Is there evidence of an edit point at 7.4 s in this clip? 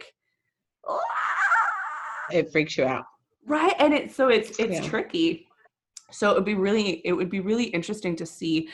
no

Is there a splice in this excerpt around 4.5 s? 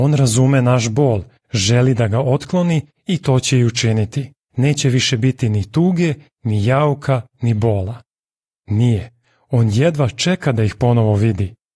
yes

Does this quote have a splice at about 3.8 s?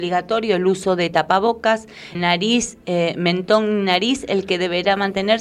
no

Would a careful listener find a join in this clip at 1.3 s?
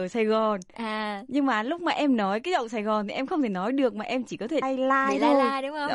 no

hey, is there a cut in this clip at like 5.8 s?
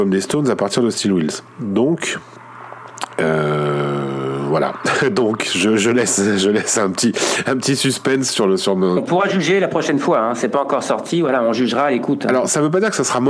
no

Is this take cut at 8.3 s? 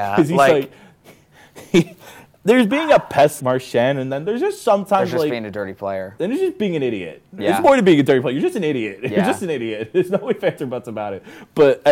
no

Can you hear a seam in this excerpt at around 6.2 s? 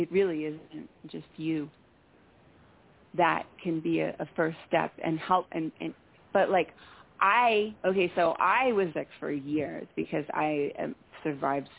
yes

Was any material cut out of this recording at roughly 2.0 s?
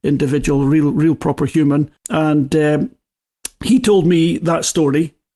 yes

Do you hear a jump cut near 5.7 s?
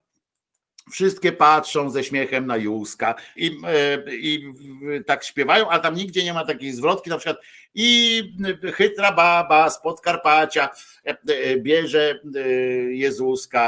no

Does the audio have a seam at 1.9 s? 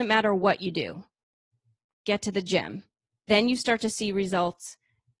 yes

